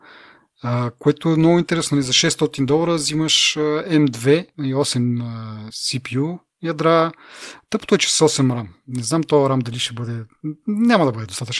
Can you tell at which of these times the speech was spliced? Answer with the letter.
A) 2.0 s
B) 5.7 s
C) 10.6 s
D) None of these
D